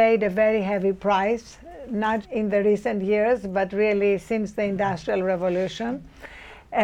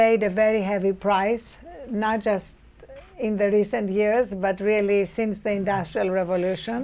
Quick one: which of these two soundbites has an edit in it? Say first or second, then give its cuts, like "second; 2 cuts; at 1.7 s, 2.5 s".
first; 1 cut; at 2.2 s